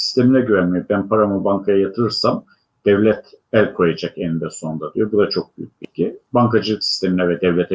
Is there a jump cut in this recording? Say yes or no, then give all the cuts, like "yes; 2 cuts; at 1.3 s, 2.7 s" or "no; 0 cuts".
no; 0 cuts